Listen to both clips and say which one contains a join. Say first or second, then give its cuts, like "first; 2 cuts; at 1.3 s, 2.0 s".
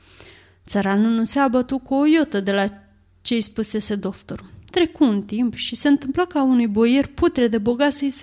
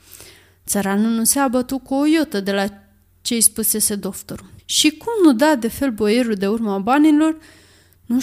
second; 1 cut; at 4.6 s